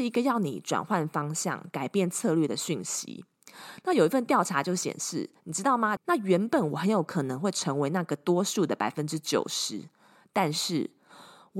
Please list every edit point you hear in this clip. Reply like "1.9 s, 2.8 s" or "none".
6.0 s